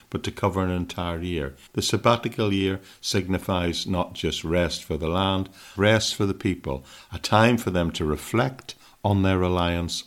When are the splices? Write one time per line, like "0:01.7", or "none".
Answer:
0:01.7
0:05.7

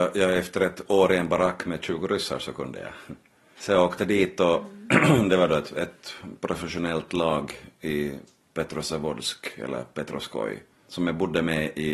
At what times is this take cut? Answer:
none

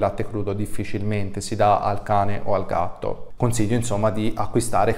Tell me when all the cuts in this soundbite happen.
0:03.4

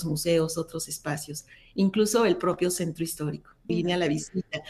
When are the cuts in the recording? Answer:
0:03.7

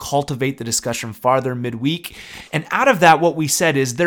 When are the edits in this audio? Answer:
0:02.5

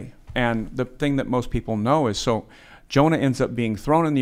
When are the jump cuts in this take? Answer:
none

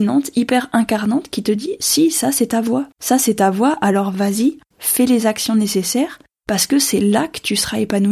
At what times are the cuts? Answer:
0:02.9
0:04.7

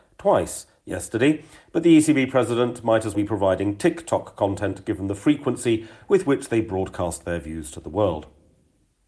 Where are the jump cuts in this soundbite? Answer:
0:03.1

